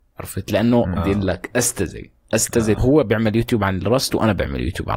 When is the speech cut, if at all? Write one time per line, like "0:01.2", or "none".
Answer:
0:01.0
0:02.8